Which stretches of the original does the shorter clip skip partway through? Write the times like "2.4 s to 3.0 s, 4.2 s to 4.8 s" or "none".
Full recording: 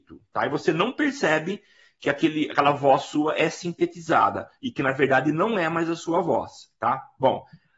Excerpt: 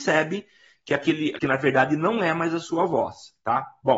2.5 s to 4.7 s